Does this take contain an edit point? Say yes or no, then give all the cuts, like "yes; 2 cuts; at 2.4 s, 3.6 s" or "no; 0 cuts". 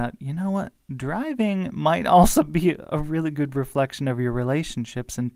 no; 0 cuts